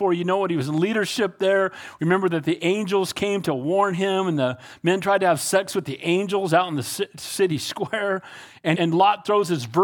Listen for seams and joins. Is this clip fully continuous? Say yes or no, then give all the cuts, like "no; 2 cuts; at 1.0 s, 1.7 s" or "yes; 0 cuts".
no; 1 cut; at 8.7 s